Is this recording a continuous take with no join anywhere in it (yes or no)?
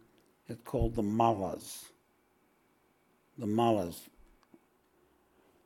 no